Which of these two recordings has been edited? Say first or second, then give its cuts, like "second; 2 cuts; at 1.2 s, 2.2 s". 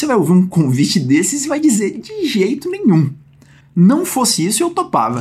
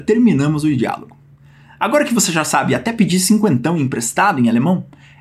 first; 1 cut; at 3.6 s